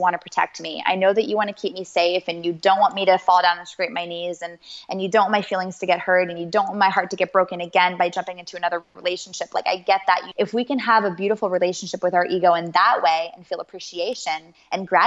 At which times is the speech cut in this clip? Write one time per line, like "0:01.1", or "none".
0:10.3